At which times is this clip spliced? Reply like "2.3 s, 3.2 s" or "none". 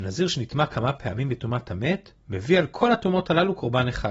2.2 s